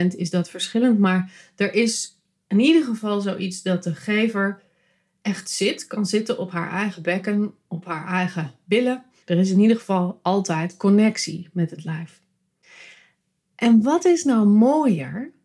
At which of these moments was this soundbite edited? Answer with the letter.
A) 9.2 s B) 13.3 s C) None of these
A